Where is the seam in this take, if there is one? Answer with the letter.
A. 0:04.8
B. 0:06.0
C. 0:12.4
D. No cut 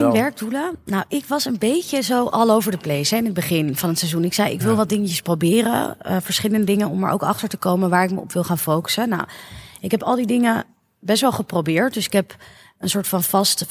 D